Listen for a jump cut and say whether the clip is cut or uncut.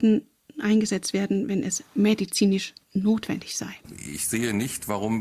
cut